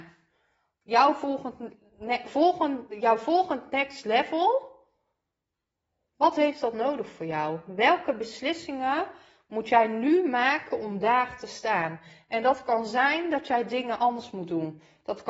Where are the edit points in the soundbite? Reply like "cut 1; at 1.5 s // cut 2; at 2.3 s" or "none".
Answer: none